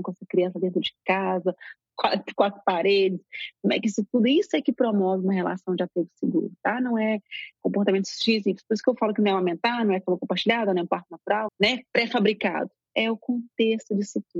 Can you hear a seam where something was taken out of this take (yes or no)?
yes